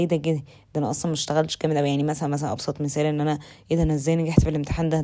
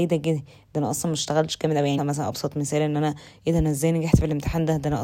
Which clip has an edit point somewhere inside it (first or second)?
second